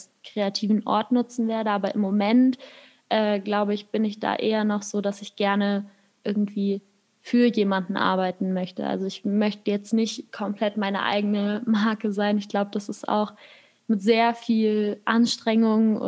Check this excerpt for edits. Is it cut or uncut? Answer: uncut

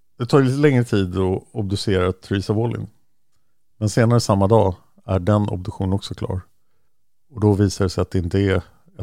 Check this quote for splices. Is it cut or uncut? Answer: uncut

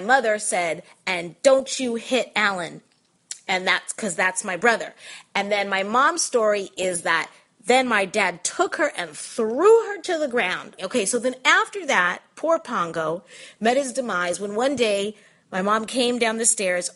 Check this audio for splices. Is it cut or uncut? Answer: cut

